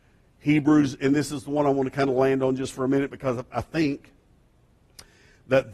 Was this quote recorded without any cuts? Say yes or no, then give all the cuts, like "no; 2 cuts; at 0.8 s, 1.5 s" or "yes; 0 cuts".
yes; 0 cuts